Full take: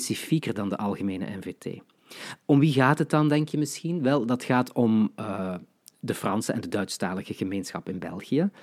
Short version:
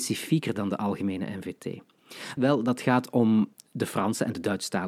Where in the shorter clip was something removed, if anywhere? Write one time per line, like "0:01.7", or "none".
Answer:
0:02.4
0:03.5

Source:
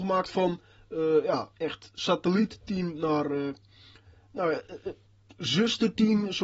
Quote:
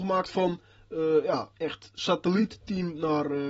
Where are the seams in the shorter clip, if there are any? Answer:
none

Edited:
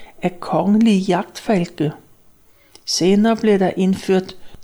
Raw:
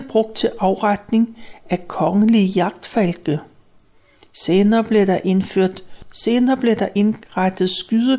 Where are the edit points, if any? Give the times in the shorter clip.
none

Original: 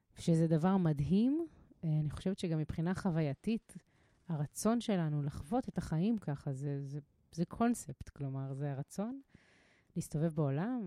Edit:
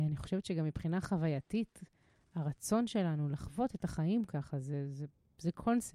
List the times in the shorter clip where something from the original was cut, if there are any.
none

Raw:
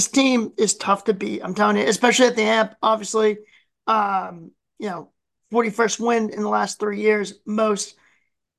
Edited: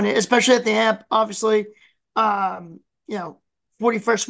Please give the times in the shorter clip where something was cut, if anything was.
none

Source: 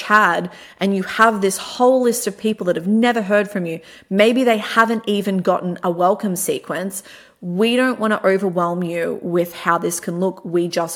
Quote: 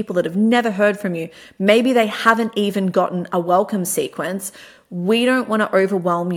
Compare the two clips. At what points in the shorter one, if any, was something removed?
none

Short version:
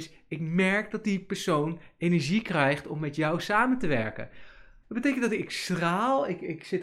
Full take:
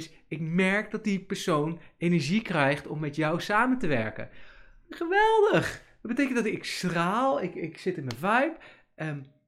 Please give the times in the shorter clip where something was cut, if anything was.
0:04.8

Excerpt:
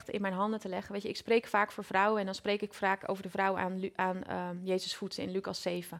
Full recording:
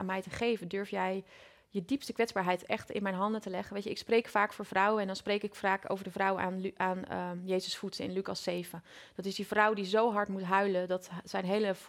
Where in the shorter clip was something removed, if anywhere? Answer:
none

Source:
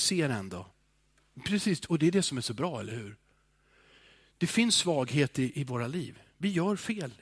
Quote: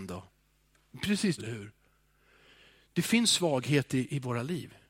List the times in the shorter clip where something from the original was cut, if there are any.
0:01.4

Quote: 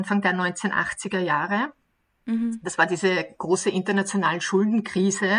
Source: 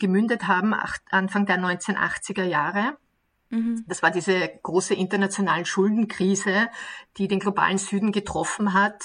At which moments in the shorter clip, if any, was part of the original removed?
none

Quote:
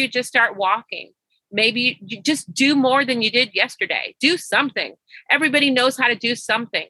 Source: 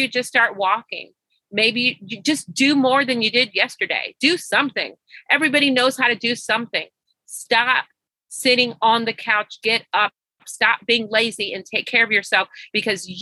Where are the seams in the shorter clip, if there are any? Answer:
none

